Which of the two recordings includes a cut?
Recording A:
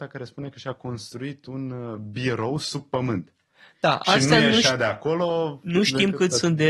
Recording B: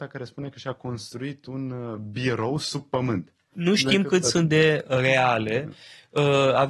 B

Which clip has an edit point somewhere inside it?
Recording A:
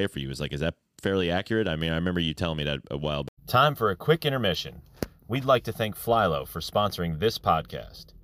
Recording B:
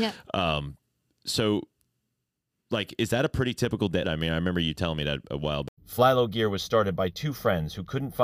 B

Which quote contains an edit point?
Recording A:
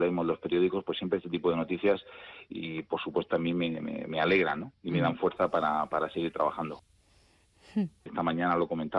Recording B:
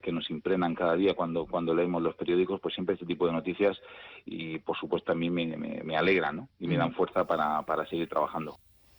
A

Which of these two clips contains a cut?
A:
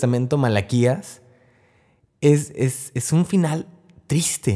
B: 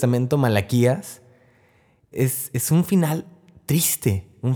B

